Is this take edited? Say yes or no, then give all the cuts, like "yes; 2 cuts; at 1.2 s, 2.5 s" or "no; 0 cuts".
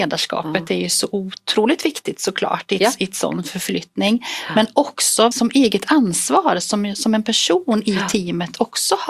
yes; 1 cut; at 5.3 s